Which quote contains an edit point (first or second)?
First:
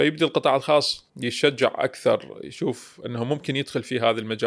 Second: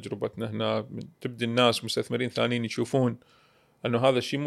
first